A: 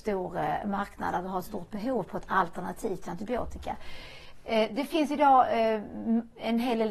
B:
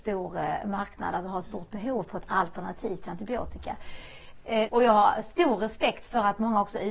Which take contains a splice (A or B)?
B